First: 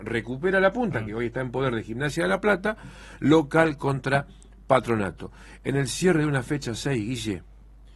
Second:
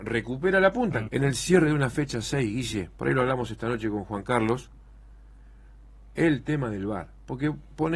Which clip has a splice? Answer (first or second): second